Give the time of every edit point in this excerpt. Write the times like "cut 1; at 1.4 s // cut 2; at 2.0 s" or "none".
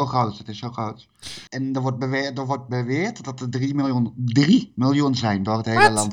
cut 1; at 1.5 s